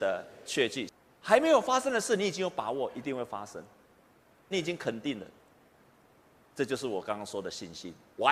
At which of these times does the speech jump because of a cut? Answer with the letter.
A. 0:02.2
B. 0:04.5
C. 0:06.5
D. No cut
B